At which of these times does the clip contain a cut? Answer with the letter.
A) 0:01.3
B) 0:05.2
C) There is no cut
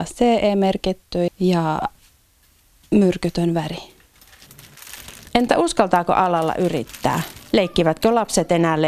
A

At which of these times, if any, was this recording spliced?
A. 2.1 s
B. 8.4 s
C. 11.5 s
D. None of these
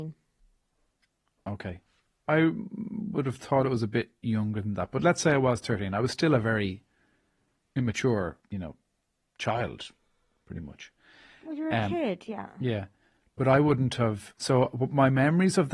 B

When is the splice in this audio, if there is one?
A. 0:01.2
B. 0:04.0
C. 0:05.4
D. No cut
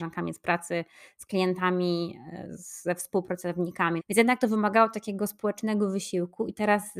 B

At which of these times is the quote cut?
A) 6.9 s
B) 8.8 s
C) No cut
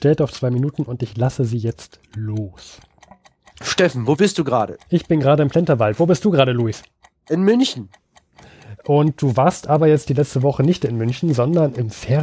B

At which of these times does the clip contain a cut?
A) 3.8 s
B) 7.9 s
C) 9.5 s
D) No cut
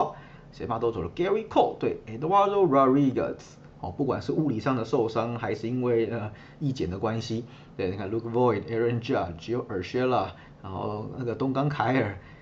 A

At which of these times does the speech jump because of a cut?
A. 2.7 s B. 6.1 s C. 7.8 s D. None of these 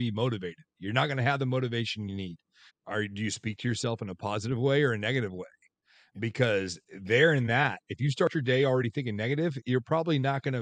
A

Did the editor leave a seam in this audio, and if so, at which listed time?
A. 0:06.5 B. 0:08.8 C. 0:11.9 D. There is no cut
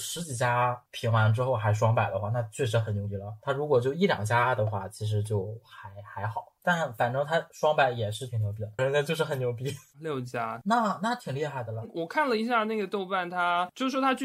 B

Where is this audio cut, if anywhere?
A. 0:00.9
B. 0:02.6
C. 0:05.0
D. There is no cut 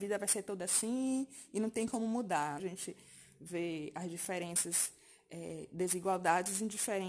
B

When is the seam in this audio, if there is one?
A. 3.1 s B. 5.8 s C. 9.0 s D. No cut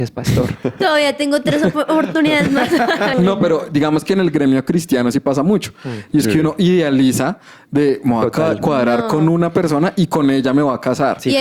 A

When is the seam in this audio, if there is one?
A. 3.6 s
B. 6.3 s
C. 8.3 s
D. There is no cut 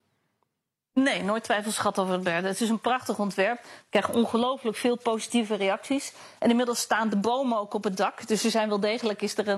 A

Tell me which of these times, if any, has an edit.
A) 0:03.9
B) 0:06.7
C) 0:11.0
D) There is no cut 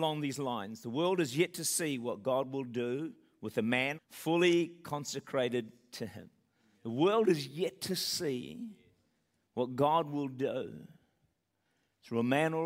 A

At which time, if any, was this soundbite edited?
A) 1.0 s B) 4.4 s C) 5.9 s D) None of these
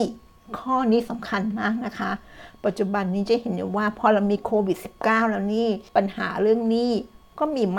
C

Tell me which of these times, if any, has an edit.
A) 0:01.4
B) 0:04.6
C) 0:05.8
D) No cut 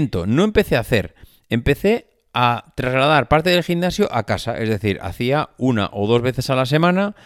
D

